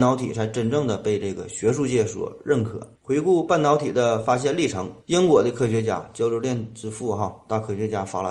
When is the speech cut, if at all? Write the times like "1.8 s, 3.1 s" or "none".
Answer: 3.0 s, 5.0 s